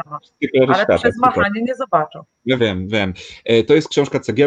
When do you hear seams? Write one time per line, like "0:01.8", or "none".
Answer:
0:02.6